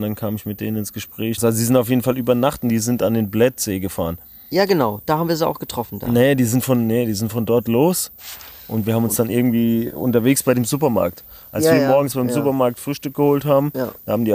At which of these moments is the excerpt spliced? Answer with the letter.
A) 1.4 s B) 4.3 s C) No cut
A